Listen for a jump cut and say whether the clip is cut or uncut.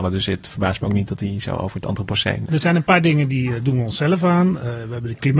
cut